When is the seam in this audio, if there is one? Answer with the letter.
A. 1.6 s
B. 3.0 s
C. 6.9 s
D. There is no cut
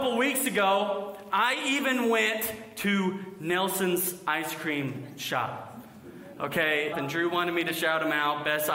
C